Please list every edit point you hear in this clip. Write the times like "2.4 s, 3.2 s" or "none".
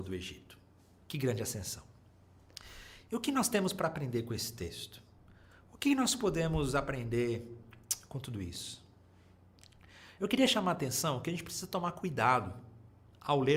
none